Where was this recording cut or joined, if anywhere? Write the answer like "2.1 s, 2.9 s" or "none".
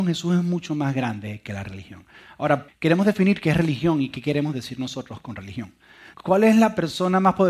2.7 s, 6.1 s